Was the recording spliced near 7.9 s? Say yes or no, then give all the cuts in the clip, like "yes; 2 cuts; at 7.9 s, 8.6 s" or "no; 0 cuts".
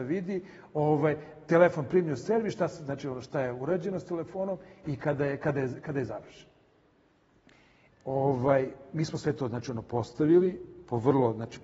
yes; 1 cut; at 7.9 s